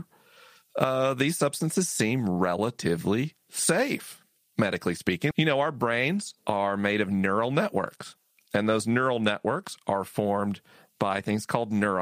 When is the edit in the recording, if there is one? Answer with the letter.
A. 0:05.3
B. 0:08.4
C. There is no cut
A